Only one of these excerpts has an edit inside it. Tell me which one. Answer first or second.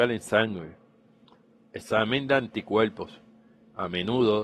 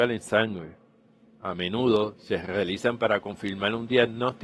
second